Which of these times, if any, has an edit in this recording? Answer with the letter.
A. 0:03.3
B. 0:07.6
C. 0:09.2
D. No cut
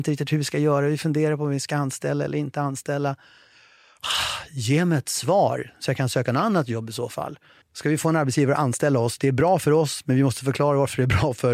B